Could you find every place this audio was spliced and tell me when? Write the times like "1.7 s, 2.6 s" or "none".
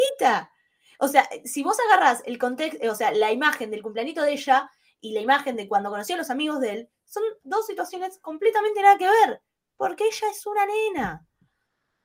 none